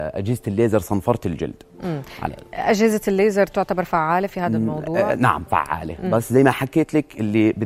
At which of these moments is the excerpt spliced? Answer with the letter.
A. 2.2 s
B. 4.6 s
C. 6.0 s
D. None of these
D